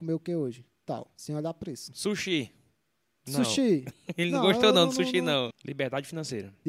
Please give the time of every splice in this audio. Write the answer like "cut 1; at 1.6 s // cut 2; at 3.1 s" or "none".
cut 1; at 5.5 s